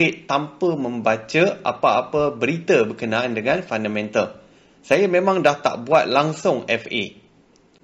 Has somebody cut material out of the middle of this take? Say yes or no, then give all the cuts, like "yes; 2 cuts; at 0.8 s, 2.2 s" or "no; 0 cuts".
no; 0 cuts